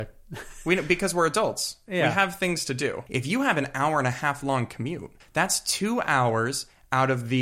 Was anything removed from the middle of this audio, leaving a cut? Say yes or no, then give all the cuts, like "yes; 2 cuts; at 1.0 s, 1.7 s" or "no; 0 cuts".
yes; 2 cuts; at 3.1 s, 5.2 s